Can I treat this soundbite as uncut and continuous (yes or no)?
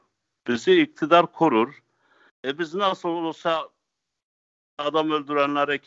no